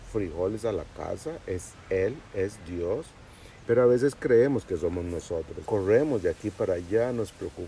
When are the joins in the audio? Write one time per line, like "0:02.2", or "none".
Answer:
0:03.6
0:05.7